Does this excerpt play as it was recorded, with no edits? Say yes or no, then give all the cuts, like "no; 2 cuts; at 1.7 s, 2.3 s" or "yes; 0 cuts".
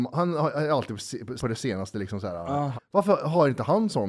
no; 2 cuts; at 1.4 s, 2.8 s